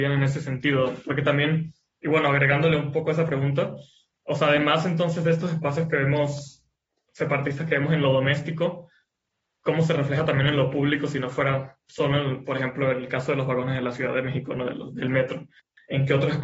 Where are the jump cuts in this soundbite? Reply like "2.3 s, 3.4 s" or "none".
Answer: none